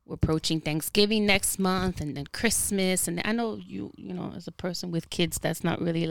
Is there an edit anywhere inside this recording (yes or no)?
no